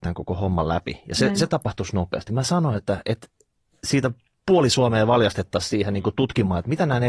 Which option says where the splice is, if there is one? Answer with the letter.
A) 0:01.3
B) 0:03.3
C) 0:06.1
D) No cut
D